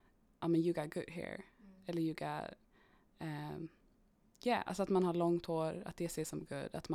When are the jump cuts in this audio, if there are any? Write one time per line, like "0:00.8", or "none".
none